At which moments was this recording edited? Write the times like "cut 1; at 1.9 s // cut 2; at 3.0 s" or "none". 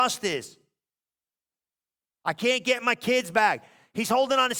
cut 1; at 2.1 s